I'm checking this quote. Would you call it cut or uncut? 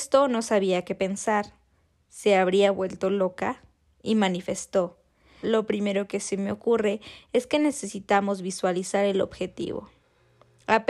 cut